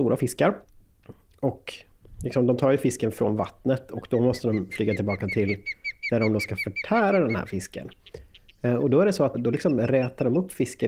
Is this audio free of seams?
no; 1 cut; at 9.3 s

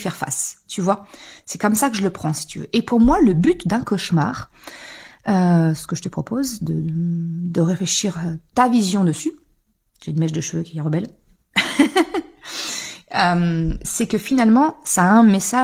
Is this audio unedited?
yes; 0 cuts

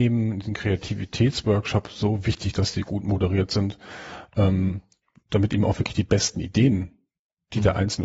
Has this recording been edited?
no; 0 cuts

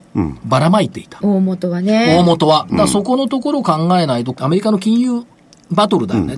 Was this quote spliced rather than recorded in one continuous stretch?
yes; 2 cuts; at 1.2 s, 4.3 s

